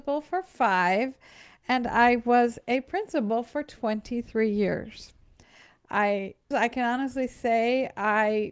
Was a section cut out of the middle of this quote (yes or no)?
yes